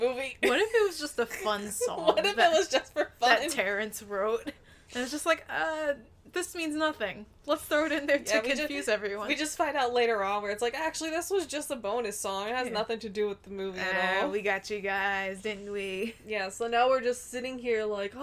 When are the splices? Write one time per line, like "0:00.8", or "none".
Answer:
none